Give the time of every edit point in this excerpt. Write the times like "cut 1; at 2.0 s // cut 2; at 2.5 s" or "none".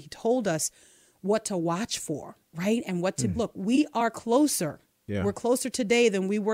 cut 1; at 3.3 s